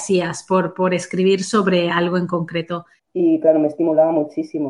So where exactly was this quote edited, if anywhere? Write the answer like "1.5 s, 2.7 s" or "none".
3.0 s